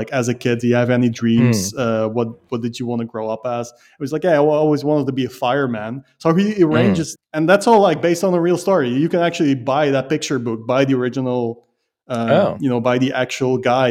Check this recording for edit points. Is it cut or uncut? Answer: cut